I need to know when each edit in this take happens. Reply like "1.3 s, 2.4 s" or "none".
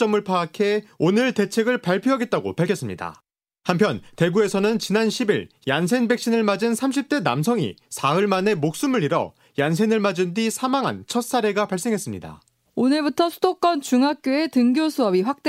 12.6 s